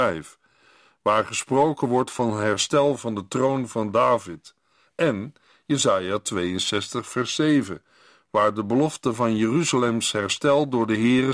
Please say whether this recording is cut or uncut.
uncut